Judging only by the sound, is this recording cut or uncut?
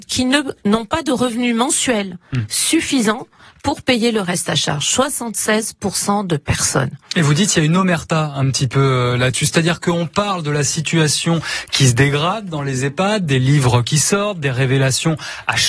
uncut